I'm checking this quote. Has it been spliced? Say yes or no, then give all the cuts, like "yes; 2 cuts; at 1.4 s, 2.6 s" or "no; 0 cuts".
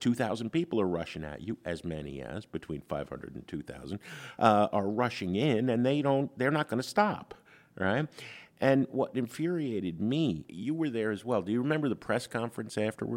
yes; 1 cut; at 10.5 s